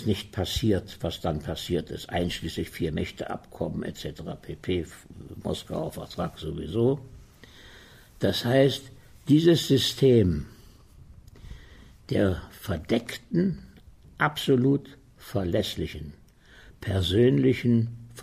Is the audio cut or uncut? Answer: uncut